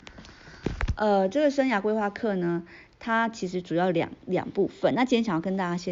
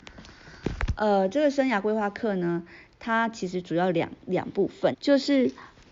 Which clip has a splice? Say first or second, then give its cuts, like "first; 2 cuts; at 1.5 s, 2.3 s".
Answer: second; 1 cut; at 4.9 s